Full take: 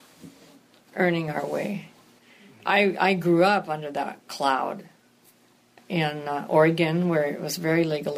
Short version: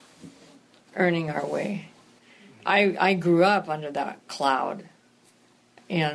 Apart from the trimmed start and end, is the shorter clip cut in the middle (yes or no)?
no